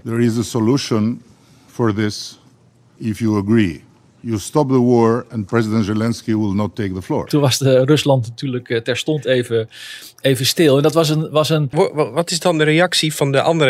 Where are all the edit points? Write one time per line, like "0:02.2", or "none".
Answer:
none